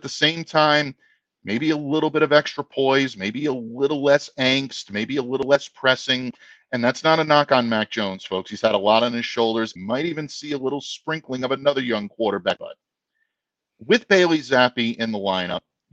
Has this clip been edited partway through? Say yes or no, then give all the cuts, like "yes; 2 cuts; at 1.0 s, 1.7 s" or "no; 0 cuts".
yes; 2 cuts; at 9.8 s, 12.6 s